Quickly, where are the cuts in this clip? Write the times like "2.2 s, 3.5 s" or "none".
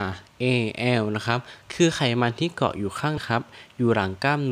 3.2 s